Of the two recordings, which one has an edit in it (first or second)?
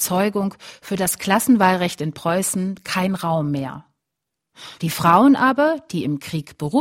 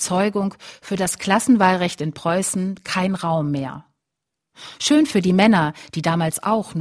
first